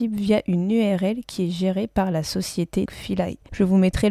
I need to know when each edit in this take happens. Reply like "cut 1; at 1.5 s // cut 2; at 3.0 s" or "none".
cut 1; at 2.9 s